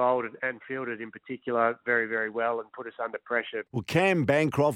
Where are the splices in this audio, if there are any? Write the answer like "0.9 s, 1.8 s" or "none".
3.7 s